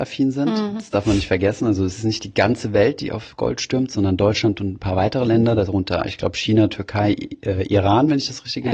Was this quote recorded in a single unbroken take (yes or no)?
yes